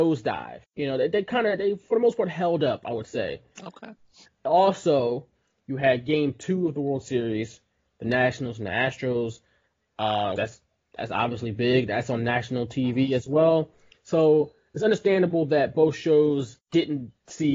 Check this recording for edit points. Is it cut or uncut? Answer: cut